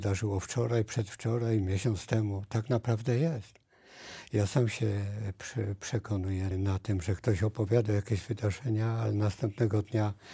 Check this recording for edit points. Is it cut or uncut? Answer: cut